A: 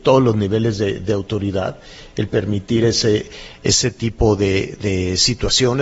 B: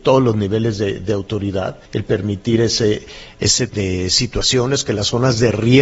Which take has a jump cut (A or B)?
B